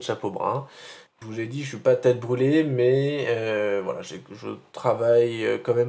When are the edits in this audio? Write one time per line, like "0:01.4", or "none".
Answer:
0:01.1